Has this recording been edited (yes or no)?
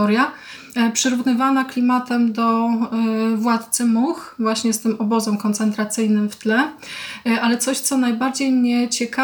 no